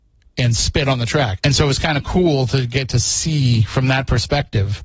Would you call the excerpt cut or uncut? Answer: cut